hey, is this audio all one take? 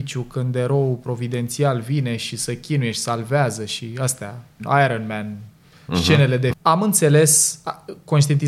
no; 2 cuts; at 4.6 s, 6.5 s

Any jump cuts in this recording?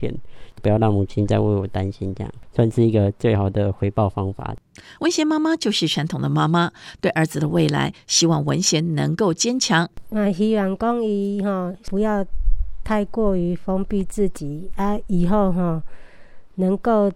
no; 0 cuts

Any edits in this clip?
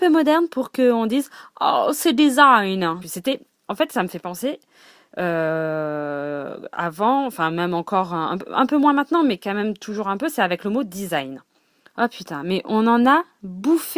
yes; 1 cut; at 3.0 s

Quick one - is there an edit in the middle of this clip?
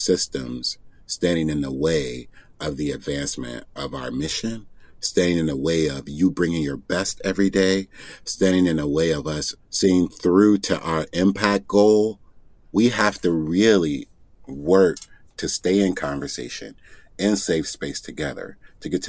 no; 0 cuts

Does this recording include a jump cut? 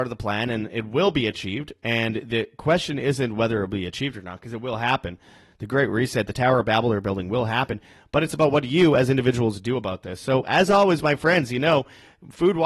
no; 0 cuts

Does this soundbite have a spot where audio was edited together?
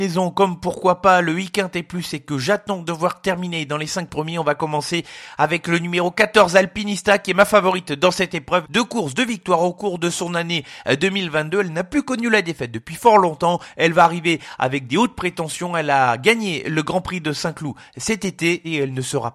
yes; 1 cut; at 8.6 s

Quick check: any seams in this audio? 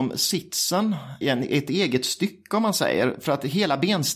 yes; 1 cut; at 1.2 s

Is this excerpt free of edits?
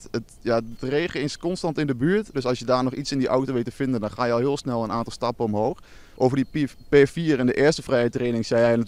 no; 2 cuts; at 2.3 s, 6.1 s

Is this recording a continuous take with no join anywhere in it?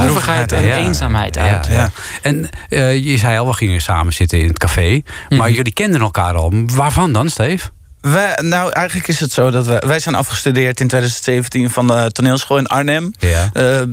yes; 0 cuts

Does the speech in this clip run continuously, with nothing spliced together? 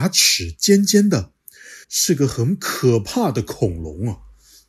no; 1 cut; at 1.8 s

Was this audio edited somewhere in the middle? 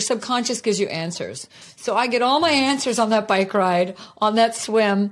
no; 0 cuts

